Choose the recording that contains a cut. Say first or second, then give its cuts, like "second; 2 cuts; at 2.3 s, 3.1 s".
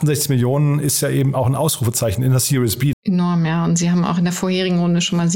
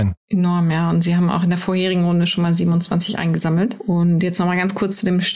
first; 1 cut; at 2.9 s